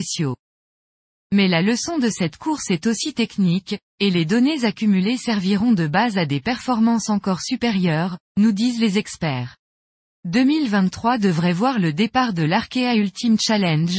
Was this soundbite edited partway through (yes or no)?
no